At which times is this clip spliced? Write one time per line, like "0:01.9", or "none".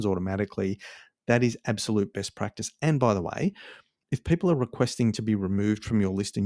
0:04.0